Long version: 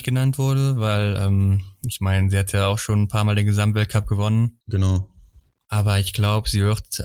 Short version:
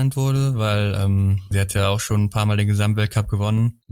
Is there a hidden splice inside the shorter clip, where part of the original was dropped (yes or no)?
yes